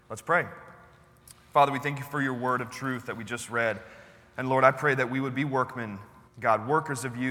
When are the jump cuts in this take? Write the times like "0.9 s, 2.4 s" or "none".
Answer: 6.3 s